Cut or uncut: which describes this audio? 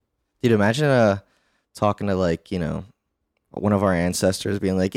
uncut